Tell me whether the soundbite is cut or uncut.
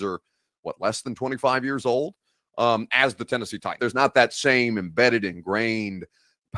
cut